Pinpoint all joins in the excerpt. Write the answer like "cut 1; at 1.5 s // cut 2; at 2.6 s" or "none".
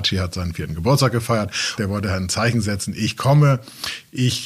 cut 1; at 1.8 s

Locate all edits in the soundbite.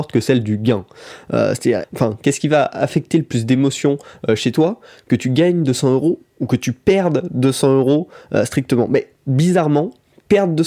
cut 1; at 1.8 s // cut 2; at 9.2 s

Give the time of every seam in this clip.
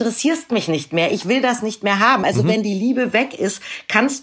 none

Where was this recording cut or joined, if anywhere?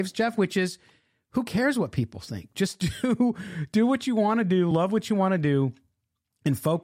none

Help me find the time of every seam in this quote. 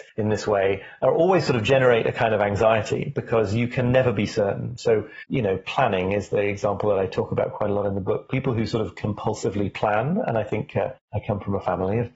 none

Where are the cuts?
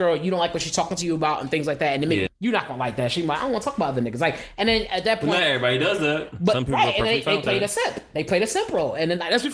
cut 1; at 2.3 s

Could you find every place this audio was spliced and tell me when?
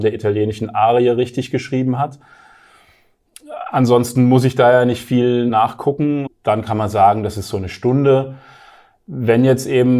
cut 1; at 6.3 s

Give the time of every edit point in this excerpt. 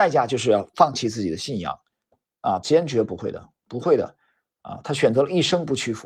cut 1; at 2.6 s

